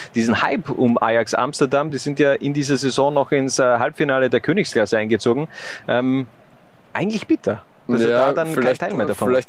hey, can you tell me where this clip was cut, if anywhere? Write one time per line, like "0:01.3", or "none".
none